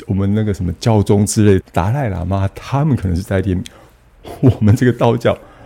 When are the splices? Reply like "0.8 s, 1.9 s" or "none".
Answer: 1.6 s